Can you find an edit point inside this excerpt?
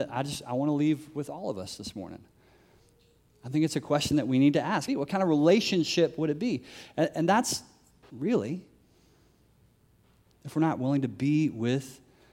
yes; 2 cuts; at 4.9 s, 8.1 s

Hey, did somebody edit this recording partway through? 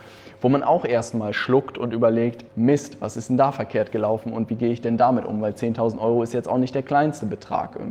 yes; 1 cut; at 2.5 s

